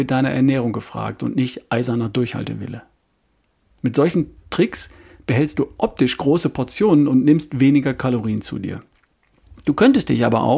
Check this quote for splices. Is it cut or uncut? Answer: cut